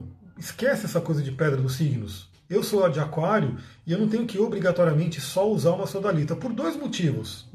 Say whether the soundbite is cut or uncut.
cut